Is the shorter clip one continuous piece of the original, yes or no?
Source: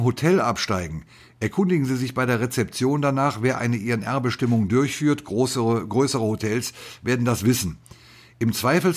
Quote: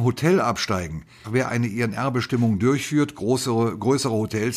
no